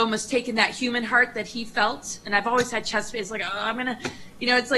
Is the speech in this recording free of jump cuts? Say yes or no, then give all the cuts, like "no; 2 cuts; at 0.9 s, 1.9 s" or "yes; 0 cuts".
yes; 0 cuts